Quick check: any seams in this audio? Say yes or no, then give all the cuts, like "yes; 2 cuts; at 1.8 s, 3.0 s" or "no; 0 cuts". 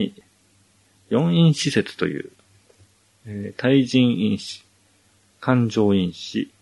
no; 0 cuts